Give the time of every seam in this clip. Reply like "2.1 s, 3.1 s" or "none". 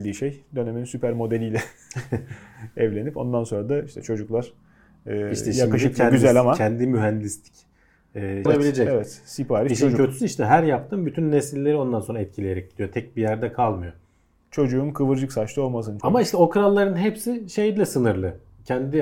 8.5 s, 16.0 s